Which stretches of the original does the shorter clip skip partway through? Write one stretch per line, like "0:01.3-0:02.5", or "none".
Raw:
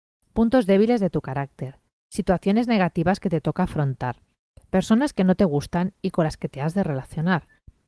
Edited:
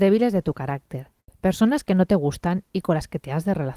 0:02.0-0:04.6